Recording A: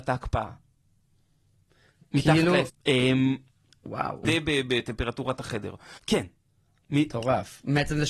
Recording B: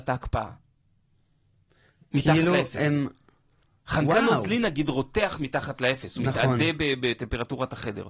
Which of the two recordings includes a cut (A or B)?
A